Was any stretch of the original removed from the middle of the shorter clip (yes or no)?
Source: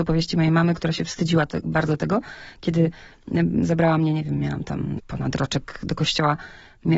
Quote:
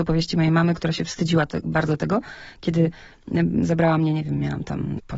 no